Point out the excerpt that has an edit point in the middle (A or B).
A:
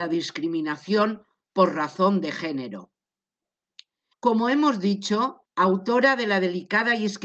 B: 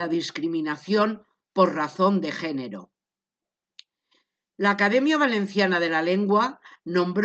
A